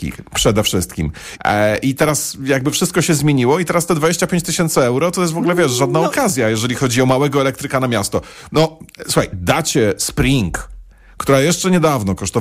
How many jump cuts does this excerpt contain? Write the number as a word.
two